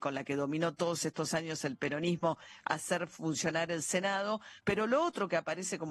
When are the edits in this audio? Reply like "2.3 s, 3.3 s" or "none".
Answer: 4.6 s